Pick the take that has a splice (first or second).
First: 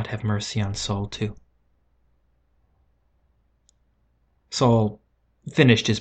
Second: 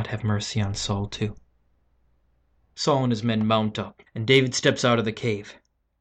second